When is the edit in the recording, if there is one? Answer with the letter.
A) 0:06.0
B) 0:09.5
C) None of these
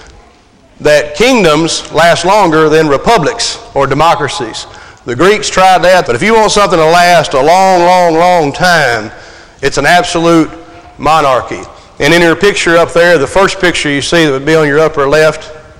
A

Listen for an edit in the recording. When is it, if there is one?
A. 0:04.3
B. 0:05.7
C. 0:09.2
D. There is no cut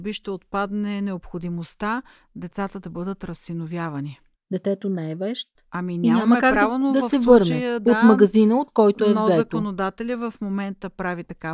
A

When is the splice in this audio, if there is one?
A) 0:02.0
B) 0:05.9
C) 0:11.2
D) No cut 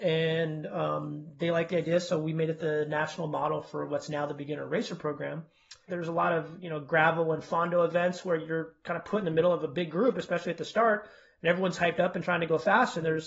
B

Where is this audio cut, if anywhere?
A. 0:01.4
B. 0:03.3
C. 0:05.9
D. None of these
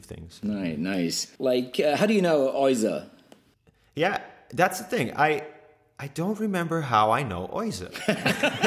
A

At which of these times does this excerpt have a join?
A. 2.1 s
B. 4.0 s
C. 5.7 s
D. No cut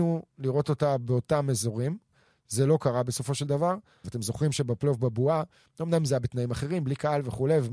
B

